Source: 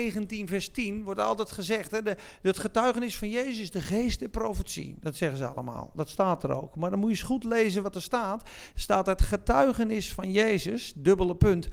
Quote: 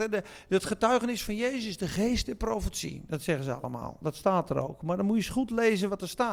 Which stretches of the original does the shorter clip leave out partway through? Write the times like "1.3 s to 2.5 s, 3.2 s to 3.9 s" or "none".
none